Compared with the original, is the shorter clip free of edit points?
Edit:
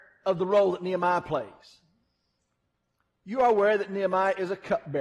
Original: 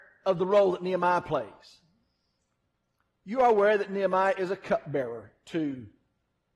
yes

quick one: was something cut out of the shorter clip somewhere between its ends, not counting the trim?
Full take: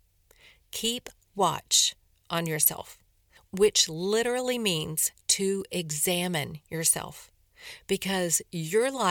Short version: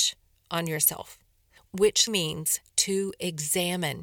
yes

